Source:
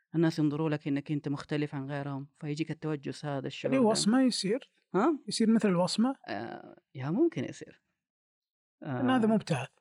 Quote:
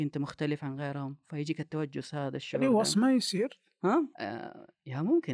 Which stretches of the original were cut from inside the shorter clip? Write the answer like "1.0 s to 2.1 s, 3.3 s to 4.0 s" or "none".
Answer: 5.2 s to 6.2 s